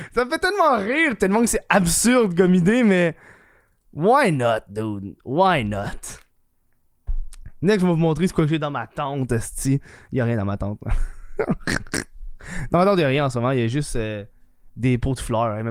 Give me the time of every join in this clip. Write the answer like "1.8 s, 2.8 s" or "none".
none